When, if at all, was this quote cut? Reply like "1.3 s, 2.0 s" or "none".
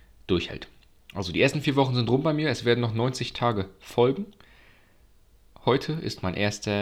none